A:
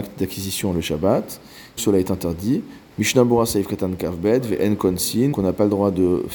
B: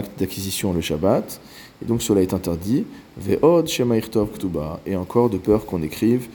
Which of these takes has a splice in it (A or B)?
A